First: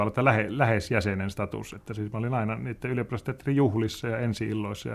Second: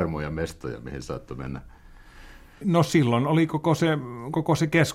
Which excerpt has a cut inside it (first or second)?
second